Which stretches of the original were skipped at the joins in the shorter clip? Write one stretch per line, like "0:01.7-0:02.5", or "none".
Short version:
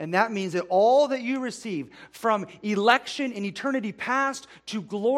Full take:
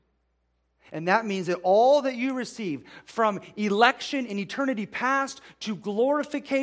none